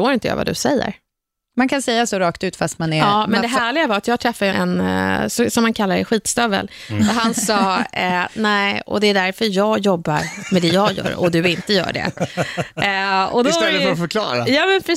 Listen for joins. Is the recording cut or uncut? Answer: cut